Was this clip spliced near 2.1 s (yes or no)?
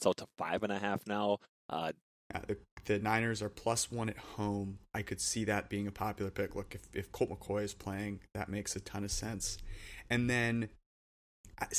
yes